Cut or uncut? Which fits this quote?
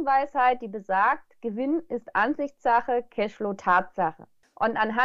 uncut